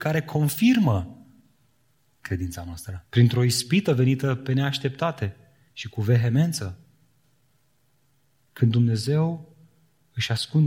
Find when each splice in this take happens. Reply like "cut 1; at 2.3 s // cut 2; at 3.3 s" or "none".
cut 1; at 3.1 s